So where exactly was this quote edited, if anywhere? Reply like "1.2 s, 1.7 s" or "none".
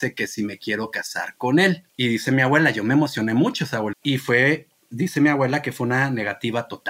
1.9 s, 3.9 s